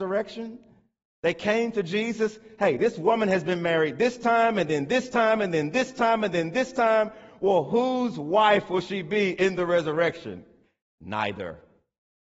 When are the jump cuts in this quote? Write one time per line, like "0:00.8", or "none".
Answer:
0:10.8